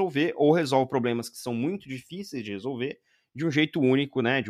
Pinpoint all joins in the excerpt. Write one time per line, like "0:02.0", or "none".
none